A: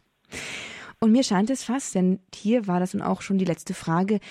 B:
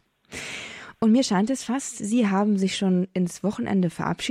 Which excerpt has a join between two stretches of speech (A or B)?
A